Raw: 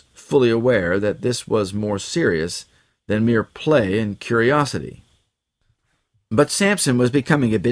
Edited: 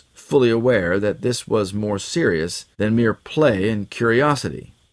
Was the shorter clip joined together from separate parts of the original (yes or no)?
yes